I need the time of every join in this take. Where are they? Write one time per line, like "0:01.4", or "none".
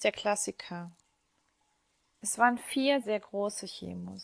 0:03.0